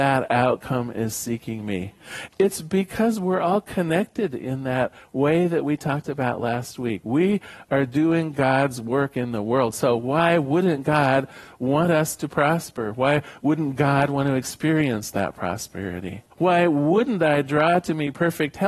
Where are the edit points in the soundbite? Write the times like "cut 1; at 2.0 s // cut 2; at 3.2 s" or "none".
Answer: cut 1; at 2.3 s // cut 2; at 16.3 s